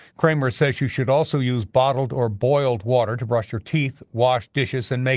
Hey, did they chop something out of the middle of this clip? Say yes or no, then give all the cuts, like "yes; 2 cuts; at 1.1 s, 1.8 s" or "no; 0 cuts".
no; 0 cuts